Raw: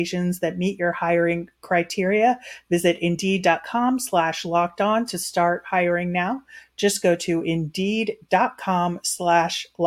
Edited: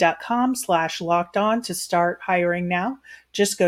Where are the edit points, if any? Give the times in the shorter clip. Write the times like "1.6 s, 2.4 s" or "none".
none